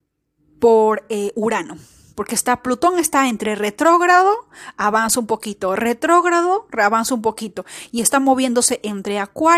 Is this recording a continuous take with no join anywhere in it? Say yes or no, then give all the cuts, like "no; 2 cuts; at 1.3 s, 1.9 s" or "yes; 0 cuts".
yes; 0 cuts